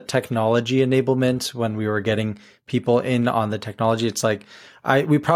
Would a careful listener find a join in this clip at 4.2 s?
no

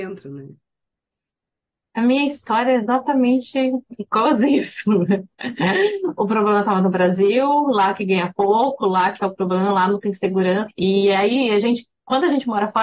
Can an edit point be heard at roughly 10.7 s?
yes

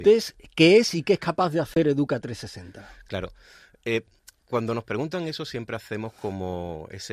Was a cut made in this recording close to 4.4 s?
no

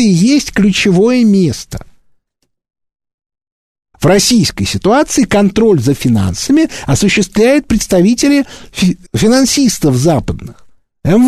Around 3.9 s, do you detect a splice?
yes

